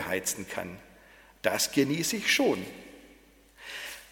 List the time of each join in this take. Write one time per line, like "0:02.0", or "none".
none